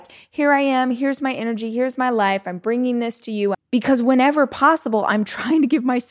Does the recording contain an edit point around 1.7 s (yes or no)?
no